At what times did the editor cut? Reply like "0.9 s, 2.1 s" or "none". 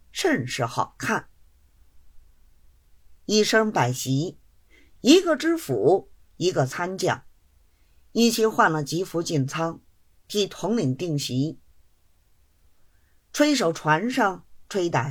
none